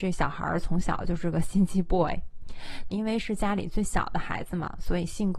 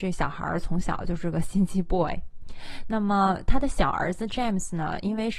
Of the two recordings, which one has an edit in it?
first; 1 cut; at 2.9 s

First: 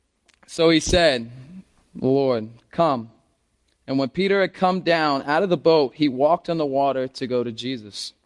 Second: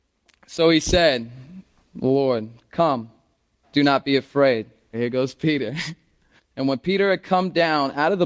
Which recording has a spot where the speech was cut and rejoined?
second; 3 cuts; at 3.6 s, 4.9 s, 6.4 s

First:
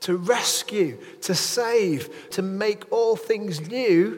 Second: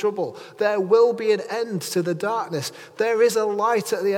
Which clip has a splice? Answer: first; 1 cut; at 2.3 s

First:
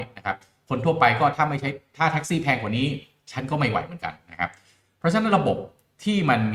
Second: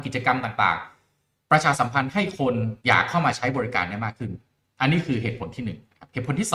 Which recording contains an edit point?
second; 1 cut; at 2.8 s

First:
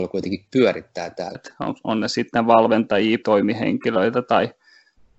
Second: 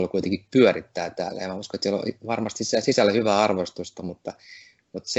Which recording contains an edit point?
first; 2 cuts; at 1.3 s, 3.2 s

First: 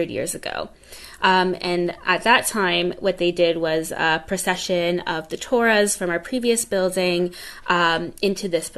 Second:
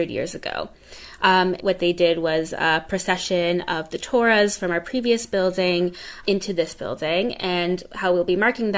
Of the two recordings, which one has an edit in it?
second; 2 cuts; at 1.6 s, 6.2 s

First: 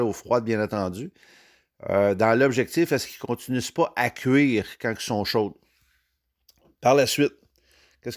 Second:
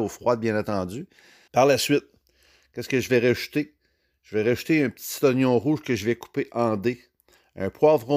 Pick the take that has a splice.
second; 1 cut; at 1.5 s

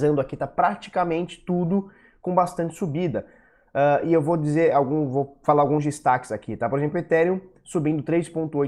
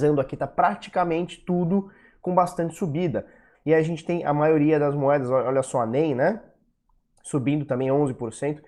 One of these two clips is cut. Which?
second; 1 cut; at 3.5 s

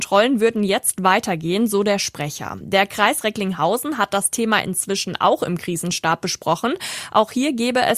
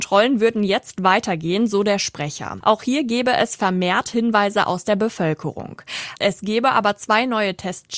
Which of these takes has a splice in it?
second; 2 cuts; at 2.6 s, 6.2 s

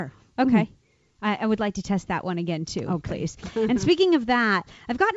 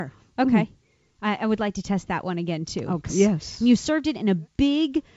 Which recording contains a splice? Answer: second; 1 cut; at 3.1 s

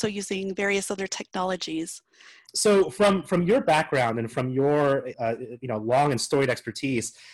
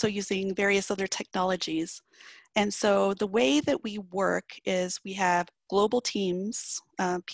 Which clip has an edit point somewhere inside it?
first; 2 cuts; at 2.5 s, 5.1 s

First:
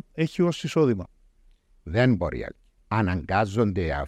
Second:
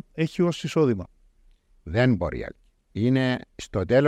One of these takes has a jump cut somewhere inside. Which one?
first; 1 cut; at 2.8 s

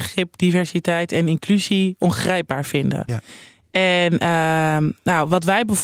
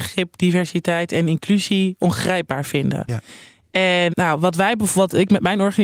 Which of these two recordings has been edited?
second; 1 cut; at 4.1 s

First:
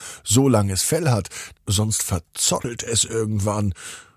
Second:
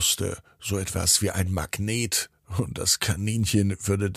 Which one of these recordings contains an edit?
first; 1 cut; at 1.5 s

